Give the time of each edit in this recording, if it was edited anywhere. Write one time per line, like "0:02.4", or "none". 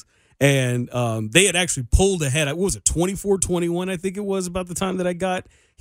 none

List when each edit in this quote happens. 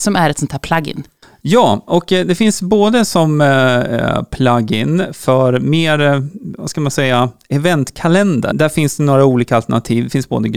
0:08.5

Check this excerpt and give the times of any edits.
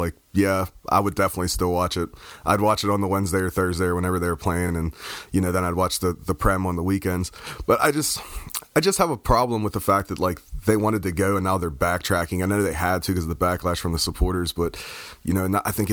none

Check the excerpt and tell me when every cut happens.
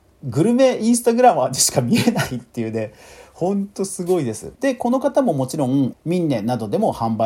0:04.6
0:05.9

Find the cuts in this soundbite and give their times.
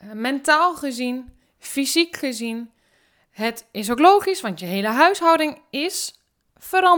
none

